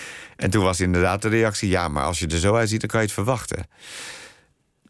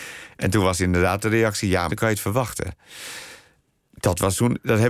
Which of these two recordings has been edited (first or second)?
second